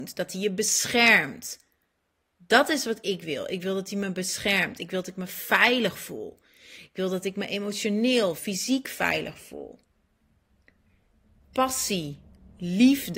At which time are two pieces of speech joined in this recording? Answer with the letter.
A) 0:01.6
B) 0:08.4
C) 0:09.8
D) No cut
B